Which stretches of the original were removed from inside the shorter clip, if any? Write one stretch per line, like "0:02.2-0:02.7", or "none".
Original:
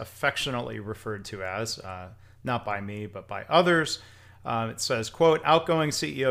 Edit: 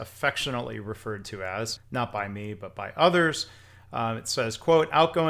0:01.8-0:02.3